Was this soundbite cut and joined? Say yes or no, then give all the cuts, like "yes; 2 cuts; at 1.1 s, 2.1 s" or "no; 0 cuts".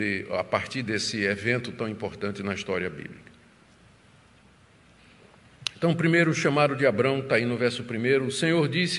no; 0 cuts